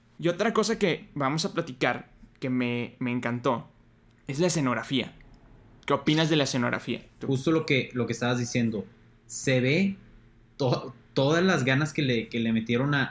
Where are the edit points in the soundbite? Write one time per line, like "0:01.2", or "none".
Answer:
0:07.2

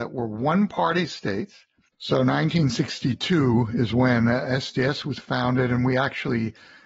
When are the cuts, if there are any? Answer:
0:01.9

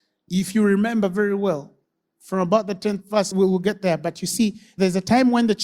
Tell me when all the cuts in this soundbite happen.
none

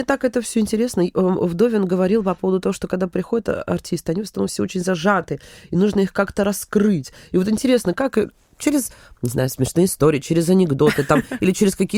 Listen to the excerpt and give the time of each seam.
none

